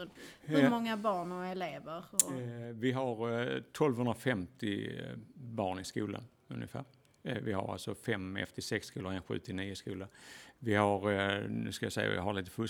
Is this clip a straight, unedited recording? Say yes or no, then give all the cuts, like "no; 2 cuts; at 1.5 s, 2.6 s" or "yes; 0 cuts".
yes; 0 cuts